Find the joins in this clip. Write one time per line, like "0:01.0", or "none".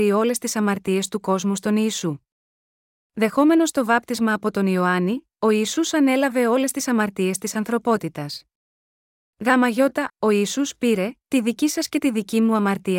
0:10.1
0:11.2